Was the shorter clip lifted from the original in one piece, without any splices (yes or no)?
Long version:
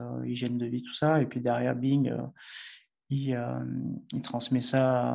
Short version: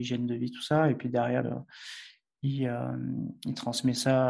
no